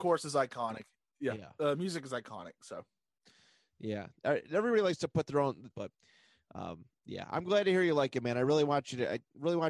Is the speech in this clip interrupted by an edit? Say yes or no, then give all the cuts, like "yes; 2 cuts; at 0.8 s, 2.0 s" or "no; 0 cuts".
yes; 1 cut; at 5.7 s